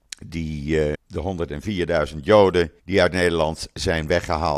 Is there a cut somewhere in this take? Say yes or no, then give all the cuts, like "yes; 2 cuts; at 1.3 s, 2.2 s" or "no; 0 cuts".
yes; 2 cuts; at 0.9 s, 2.8 s